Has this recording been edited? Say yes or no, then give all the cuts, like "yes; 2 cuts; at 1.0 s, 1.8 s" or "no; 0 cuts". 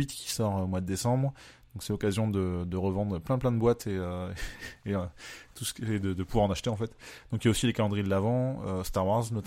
no; 0 cuts